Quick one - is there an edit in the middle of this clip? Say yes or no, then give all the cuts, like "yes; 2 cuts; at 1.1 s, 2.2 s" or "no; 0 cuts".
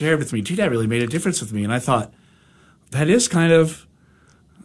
no; 0 cuts